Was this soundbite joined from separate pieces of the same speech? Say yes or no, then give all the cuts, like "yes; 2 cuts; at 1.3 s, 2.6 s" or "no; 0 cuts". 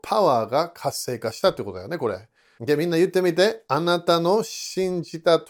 yes; 1 cut; at 2.6 s